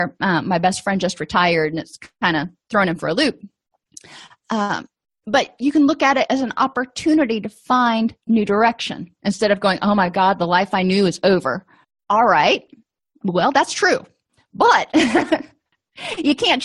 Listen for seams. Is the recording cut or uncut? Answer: uncut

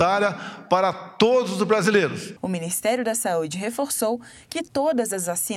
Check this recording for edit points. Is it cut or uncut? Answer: cut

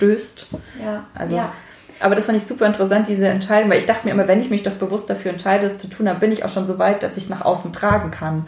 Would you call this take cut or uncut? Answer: cut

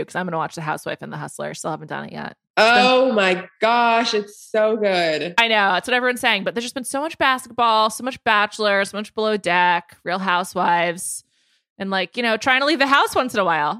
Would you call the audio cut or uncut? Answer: uncut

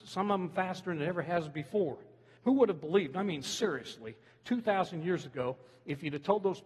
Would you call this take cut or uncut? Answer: uncut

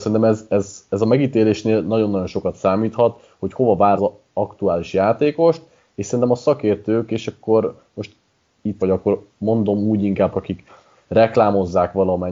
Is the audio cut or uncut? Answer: cut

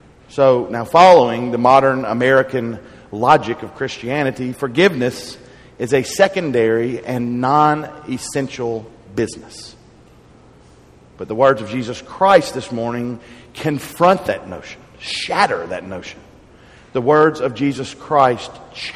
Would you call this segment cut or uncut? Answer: uncut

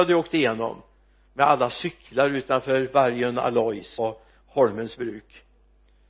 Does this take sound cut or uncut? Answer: cut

